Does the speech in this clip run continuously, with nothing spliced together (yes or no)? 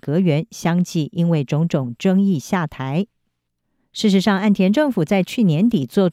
yes